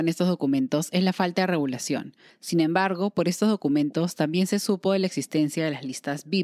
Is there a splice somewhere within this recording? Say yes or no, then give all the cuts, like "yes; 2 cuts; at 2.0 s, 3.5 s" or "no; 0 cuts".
yes; 1 cut; at 2.3 s